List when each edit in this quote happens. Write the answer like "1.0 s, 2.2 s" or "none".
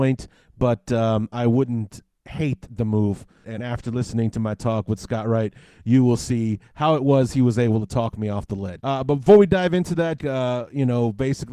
3.4 s, 8.8 s, 10.2 s